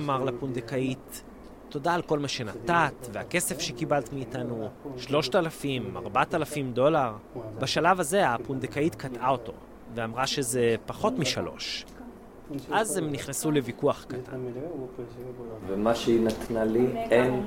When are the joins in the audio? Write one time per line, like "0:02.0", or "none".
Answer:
0:15.6